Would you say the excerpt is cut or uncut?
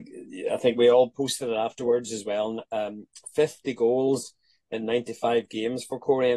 uncut